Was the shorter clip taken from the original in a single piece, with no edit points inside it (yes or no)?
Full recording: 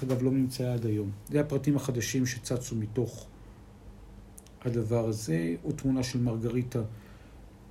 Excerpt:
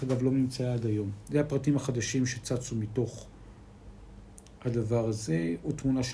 yes